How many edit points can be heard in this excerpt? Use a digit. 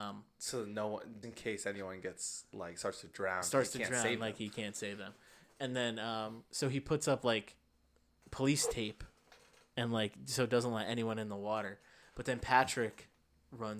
1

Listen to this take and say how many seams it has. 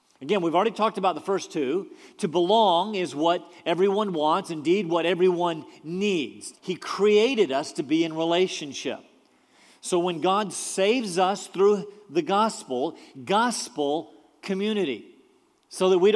2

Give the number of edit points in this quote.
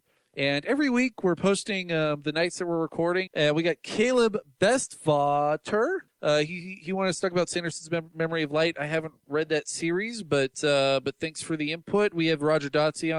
2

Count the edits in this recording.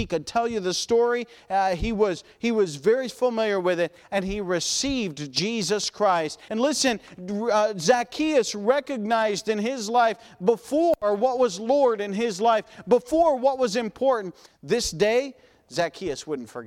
2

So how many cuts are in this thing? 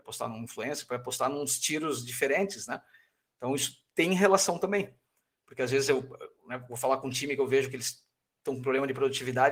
0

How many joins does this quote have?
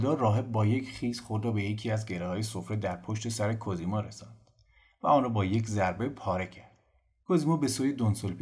0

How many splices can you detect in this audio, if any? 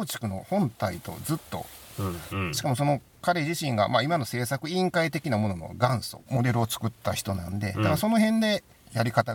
2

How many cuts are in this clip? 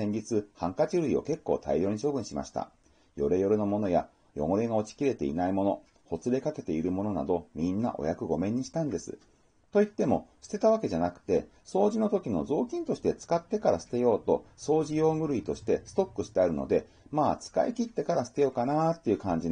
0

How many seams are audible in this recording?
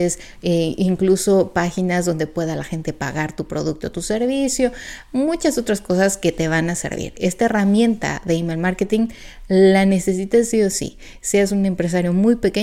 0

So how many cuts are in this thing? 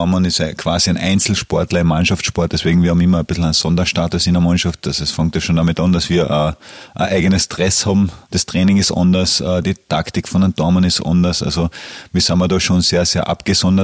0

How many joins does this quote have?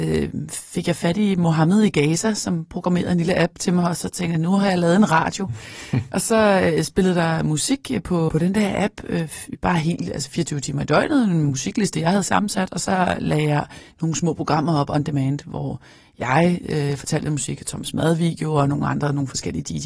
1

